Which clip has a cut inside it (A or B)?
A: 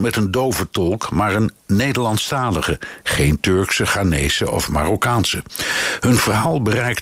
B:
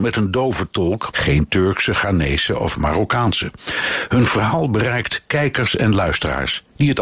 B